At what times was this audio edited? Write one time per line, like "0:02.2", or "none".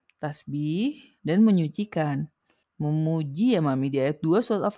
0:01.2
0:02.6